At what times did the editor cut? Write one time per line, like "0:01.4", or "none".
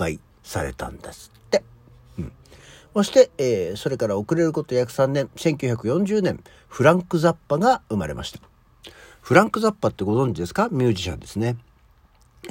none